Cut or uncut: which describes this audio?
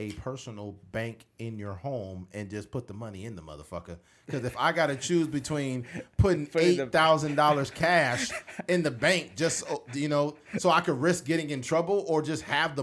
uncut